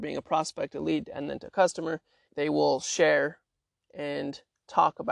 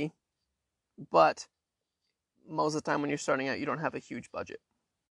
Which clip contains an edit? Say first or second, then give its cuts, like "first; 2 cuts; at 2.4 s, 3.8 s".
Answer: first; 1 cut; at 2.3 s